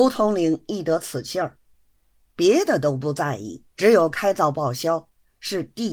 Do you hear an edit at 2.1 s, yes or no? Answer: no